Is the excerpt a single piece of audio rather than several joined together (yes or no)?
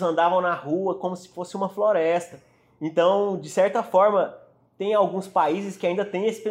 yes